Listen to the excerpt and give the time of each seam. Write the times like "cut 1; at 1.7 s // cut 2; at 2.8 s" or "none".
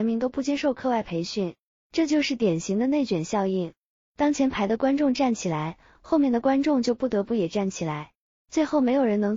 cut 1; at 1.8 s